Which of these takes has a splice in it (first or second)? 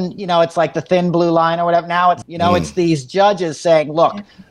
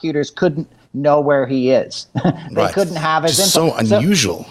first